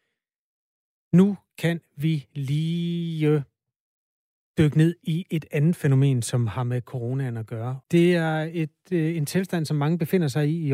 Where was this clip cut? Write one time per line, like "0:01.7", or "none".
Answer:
0:07.8